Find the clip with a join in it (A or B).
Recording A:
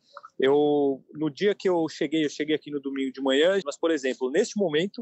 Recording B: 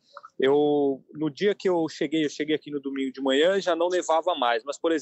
A